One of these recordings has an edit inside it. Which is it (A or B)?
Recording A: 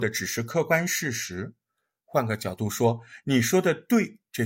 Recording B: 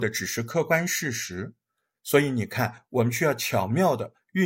B